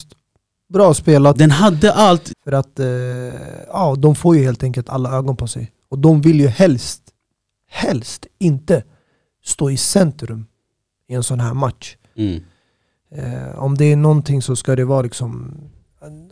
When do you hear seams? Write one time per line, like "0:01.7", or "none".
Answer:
0:02.3